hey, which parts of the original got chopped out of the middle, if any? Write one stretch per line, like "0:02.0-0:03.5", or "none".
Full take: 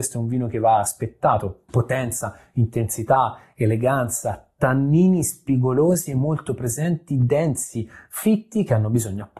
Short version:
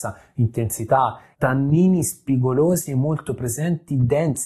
0:03.5-0:04.5